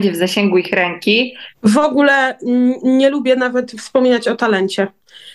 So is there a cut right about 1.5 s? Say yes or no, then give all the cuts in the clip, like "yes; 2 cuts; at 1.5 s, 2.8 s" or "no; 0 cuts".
yes; 1 cut; at 1.5 s